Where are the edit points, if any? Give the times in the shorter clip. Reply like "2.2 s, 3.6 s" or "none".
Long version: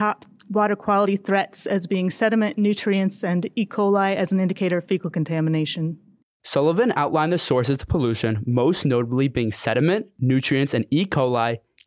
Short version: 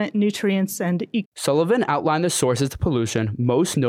1.2 s